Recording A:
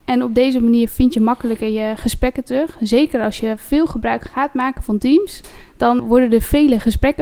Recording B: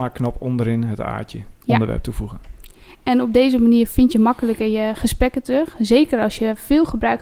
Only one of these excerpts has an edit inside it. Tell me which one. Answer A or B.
A